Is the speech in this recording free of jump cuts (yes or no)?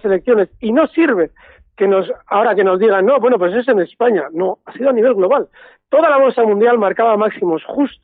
yes